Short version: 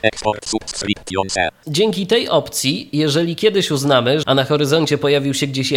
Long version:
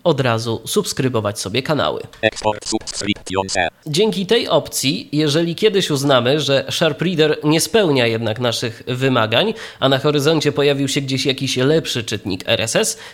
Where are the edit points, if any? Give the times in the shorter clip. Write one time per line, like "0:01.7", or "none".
0:04.2